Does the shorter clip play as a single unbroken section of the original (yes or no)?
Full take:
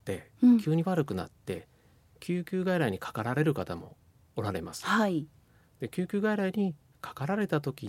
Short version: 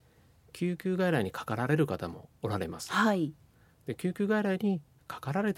no